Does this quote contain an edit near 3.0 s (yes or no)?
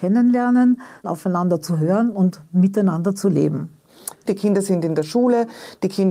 no